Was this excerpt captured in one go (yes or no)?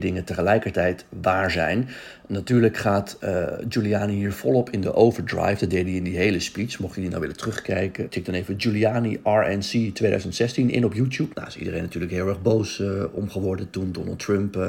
no